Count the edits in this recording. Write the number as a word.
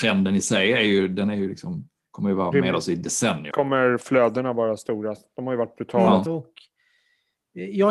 two